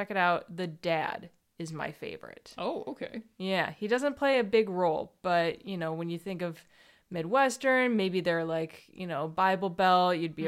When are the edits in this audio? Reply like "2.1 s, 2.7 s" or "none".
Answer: none

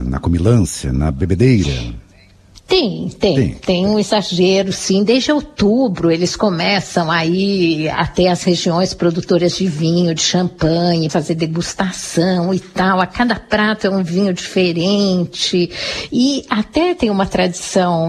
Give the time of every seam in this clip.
11.1 s, 16.1 s

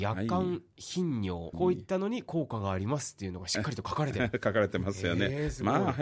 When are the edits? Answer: 1.5 s

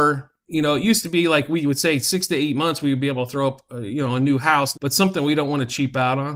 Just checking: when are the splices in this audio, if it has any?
4.7 s

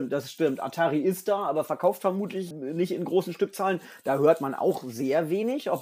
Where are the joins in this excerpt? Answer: 2.5 s

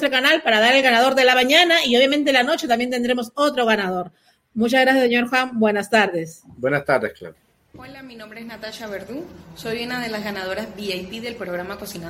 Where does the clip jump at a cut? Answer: none

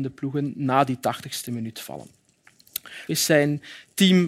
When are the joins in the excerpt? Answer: 3.1 s

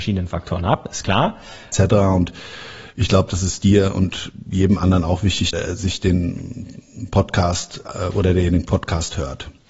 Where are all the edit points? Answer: 1.7 s, 5.5 s

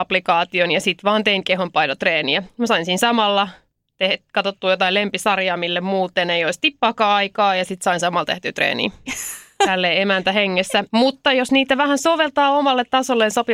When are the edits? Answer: 9.1 s, 10.9 s

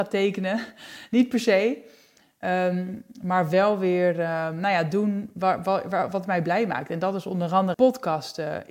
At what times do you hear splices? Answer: 7.7 s

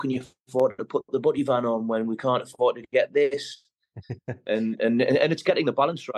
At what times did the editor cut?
none

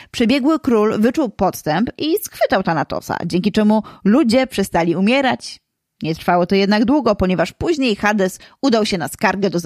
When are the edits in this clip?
none

